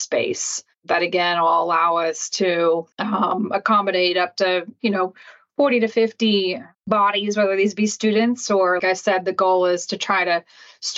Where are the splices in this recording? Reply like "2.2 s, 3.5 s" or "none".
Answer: 2.9 s, 8.8 s